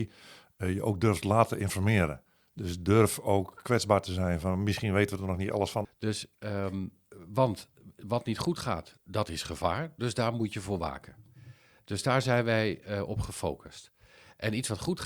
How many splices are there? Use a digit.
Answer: 2